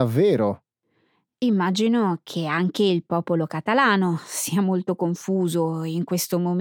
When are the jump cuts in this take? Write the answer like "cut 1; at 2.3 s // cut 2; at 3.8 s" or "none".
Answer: none